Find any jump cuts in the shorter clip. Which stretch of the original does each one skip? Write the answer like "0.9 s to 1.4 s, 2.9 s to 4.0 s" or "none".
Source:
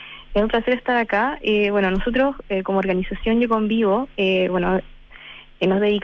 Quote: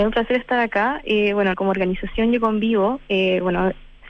1.9 s to 2.6 s